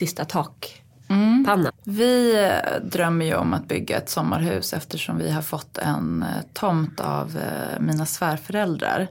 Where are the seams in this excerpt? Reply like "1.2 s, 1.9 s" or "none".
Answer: 1.7 s